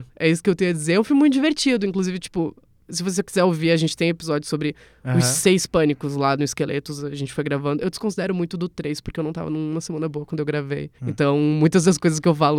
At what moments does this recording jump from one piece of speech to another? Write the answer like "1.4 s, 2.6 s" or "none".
11.0 s